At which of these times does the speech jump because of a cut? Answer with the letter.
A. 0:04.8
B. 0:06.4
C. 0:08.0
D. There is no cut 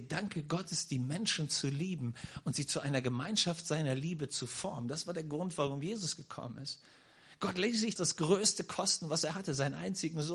C